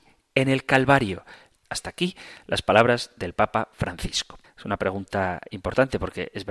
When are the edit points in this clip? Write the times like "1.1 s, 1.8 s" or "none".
1.5 s, 4.4 s